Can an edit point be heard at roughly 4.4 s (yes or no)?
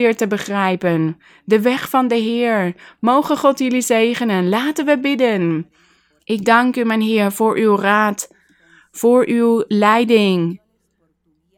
no